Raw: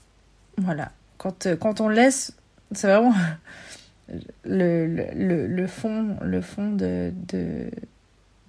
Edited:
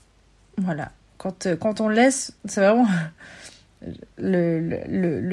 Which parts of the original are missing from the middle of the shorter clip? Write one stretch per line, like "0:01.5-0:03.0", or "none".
0:02.4-0:02.6